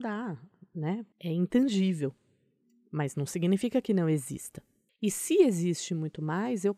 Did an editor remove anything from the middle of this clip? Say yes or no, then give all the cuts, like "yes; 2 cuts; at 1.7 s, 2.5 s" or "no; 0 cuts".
yes; 2 cuts; at 1.1 s, 4.9 s